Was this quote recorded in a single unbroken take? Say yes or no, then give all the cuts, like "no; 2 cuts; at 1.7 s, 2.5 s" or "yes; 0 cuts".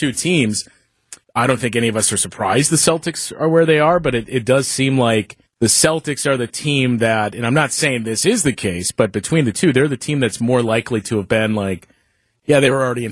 no; 2 cuts; at 1.2 s, 5.5 s